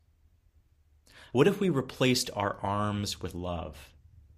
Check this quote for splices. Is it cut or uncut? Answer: cut